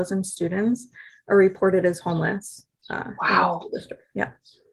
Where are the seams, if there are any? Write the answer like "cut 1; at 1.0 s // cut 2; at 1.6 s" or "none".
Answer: none